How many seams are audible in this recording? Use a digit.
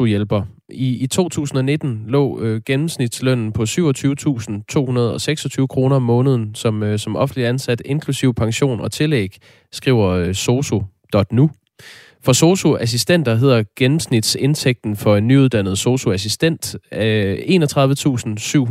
1